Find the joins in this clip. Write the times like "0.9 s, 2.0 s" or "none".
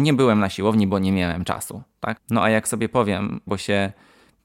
2.2 s, 3.5 s